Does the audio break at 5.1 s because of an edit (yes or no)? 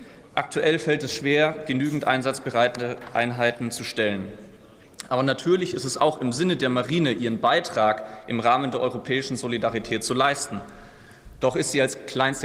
no